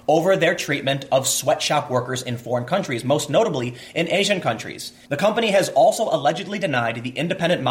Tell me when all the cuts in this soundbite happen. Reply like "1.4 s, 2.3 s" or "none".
5.1 s